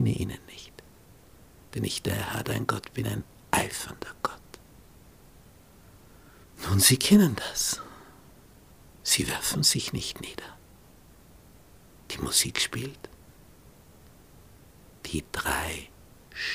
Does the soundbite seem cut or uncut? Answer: uncut